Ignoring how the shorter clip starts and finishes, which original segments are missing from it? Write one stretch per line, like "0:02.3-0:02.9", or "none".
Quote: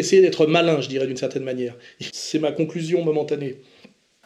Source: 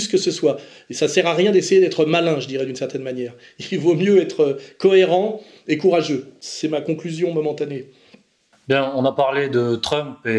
0:03.7-0:06.4